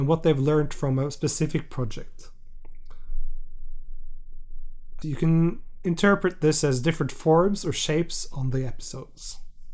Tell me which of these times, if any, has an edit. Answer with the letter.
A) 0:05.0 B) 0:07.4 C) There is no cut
A